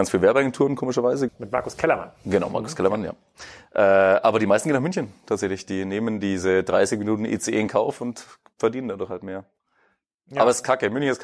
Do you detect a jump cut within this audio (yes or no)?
yes